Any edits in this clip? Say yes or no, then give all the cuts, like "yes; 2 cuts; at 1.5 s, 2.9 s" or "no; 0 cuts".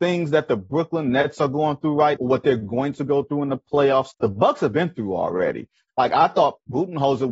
yes; 3 cuts; at 2.2 s, 4.1 s, 5.9 s